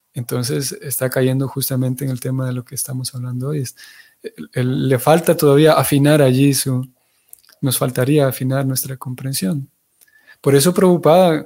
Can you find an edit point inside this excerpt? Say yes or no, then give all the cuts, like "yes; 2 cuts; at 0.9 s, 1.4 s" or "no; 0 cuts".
no; 0 cuts